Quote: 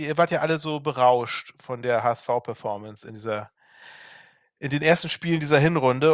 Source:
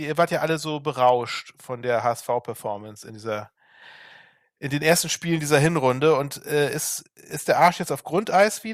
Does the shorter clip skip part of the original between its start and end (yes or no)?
no